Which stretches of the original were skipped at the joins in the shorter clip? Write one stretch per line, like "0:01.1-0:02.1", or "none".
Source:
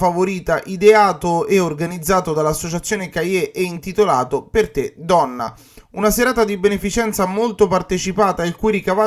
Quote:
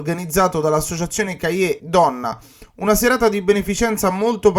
0:03.5-0:05.0